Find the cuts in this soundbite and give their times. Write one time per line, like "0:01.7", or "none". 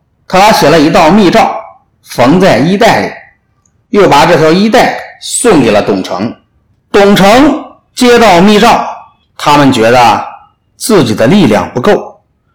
0:09.2